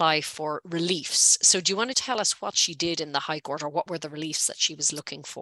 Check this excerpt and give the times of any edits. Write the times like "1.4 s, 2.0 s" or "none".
1.9 s